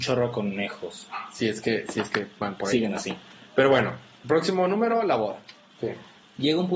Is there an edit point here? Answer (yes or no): yes